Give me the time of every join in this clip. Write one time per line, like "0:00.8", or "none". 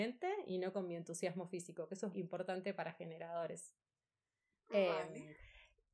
0:02.1